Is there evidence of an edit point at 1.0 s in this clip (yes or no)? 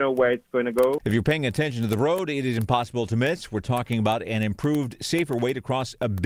yes